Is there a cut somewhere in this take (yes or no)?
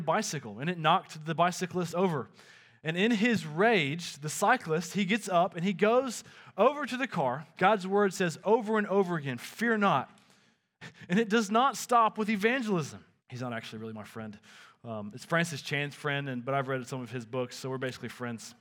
yes